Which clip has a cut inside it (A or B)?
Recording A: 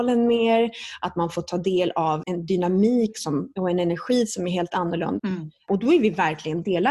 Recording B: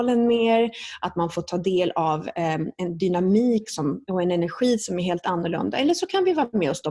A